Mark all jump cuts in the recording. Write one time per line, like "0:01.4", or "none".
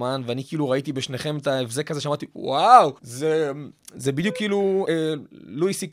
0:03.0
0:04.8